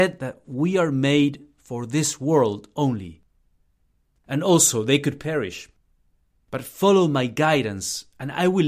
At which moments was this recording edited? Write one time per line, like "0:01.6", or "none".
0:04.2